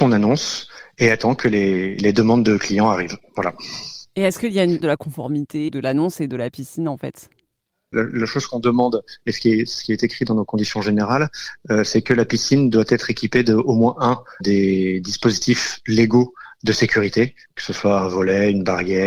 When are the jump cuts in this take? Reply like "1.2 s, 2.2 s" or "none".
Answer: 4.8 s, 14.4 s